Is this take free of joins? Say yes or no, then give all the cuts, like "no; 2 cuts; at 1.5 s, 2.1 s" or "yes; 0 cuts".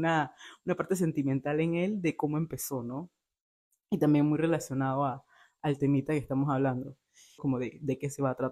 no; 1 cut; at 7.4 s